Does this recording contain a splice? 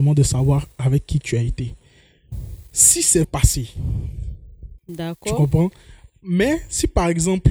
yes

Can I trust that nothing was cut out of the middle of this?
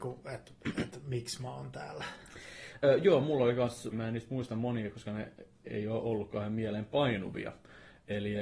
no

